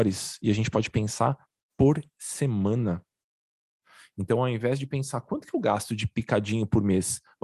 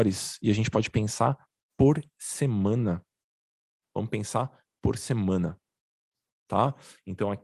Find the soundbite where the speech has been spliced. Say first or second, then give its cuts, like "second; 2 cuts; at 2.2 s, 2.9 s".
second; 1 cut; at 3.8 s